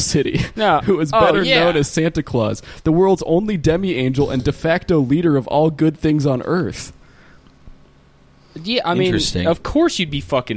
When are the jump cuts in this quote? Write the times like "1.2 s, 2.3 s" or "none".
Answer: none